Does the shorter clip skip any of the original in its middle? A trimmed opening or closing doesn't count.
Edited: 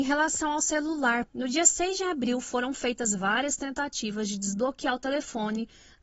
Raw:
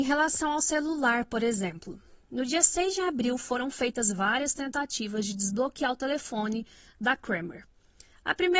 yes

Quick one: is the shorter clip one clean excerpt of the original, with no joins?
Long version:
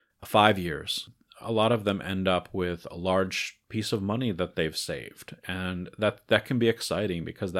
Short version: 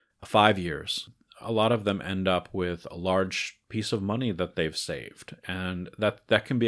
yes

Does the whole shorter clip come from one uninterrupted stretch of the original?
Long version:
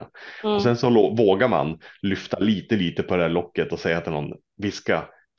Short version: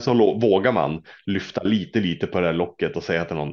yes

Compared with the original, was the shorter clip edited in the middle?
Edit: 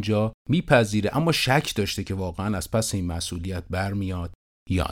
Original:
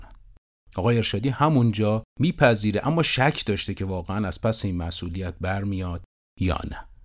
no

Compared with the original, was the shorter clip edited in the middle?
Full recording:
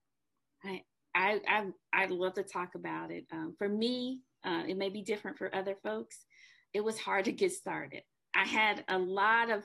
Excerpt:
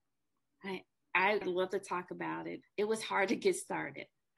yes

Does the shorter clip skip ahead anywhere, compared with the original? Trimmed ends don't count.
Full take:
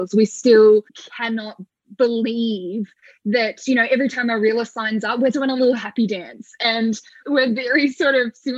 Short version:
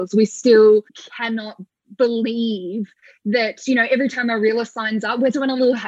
no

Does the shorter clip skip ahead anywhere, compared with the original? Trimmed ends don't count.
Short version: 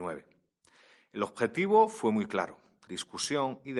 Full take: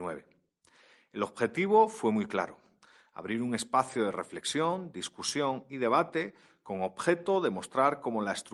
yes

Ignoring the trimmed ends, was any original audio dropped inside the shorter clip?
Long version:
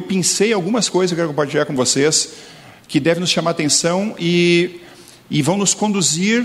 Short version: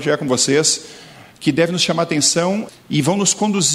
yes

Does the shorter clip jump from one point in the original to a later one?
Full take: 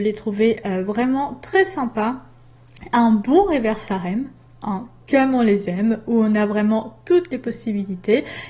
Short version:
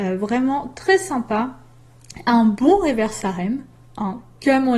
no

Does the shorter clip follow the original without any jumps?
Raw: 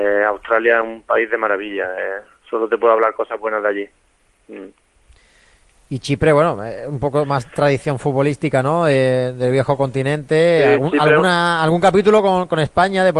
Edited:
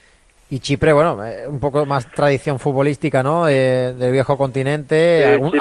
yes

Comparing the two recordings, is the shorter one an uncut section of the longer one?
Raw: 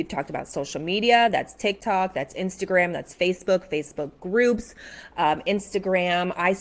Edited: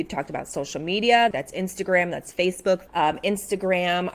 no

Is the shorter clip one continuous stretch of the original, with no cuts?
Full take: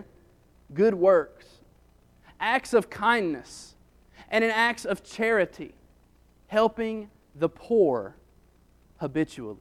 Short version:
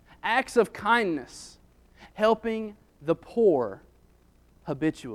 no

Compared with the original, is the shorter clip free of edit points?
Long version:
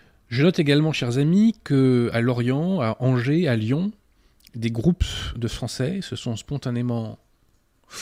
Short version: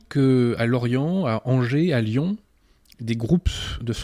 yes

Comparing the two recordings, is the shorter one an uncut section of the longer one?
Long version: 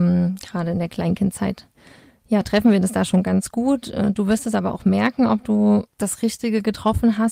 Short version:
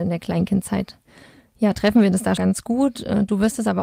no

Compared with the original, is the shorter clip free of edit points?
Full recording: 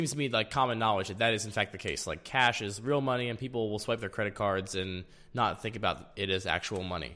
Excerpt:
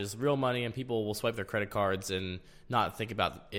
yes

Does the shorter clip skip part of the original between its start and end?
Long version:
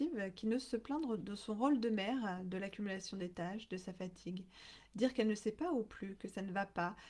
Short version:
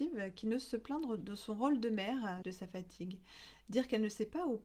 yes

